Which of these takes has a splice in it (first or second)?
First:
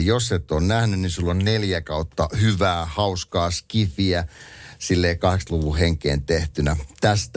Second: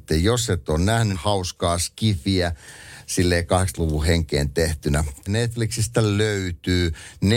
second